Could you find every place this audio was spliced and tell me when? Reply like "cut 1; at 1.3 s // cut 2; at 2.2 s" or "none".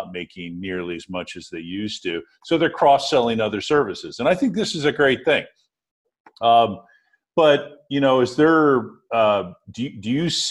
none

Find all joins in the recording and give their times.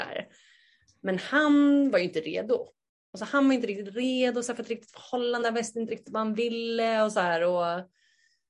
none

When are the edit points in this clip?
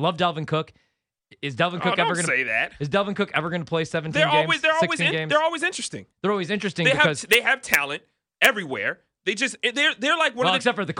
cut 1; at 6.1 s

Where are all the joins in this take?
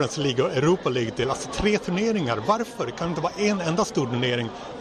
none

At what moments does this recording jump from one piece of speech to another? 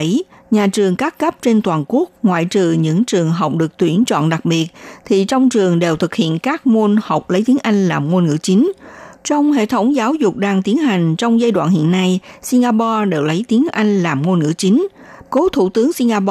cut 1; at 9.2 s // cut 2; at 15.2 s

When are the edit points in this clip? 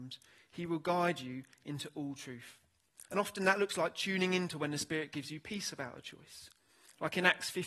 cut 1; at 3.1 s

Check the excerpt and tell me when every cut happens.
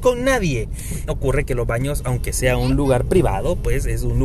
cut 1; at 1.1 s

